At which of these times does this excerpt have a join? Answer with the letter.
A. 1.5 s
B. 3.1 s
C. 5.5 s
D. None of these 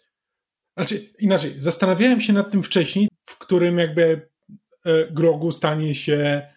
B